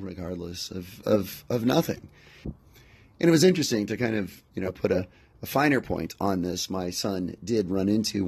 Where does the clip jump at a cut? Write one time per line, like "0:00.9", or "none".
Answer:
0:02.4